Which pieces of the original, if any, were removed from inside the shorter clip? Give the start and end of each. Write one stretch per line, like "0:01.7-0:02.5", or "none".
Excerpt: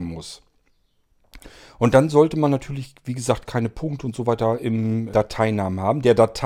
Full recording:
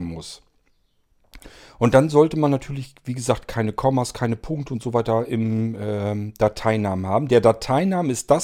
0:03.5-0:04.1
0:05.8-0:06.4